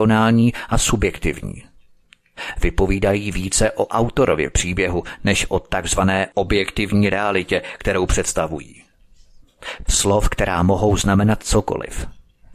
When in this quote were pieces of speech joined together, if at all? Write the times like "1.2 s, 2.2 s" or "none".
9.9 s